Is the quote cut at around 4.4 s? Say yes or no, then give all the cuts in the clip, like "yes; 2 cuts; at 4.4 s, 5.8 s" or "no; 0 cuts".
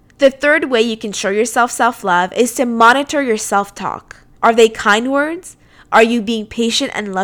yes; 1 cut; at 4.4 s